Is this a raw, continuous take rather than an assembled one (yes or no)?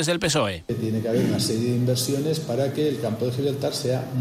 yes